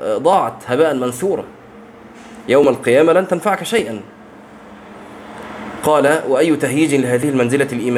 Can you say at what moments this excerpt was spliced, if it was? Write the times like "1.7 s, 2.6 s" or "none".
none